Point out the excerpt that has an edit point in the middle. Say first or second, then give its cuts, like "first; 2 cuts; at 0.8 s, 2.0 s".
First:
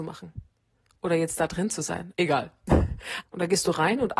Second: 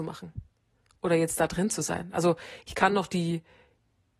first; 2 cuts; at 2.1 s, 3.2 s